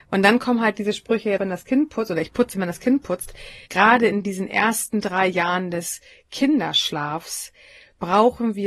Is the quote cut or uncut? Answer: cut